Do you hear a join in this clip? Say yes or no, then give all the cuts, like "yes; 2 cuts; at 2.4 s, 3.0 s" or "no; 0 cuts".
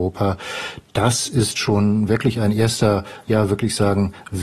no; 0 cuts